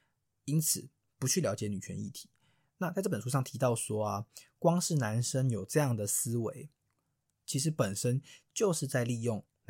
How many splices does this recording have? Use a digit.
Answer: 0